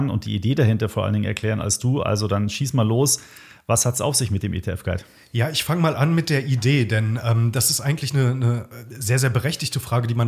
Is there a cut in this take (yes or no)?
no